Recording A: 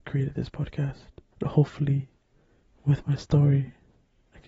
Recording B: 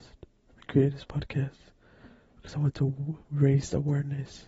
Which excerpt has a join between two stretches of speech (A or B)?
A